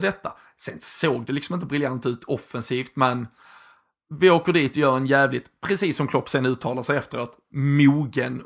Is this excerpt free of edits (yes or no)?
yes